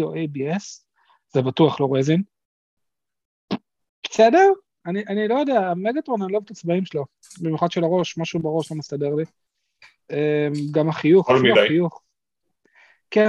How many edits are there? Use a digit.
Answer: 0